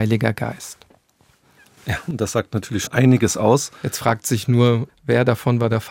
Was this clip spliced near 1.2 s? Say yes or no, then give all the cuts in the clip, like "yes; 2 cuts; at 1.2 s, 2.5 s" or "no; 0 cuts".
no; 2 cuts; at 2.9 s, 4.9 s